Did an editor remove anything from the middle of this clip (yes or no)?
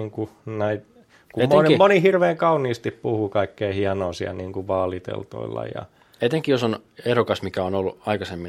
no